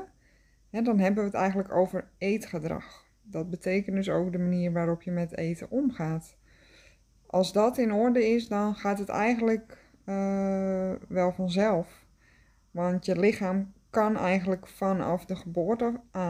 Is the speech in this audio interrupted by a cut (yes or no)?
no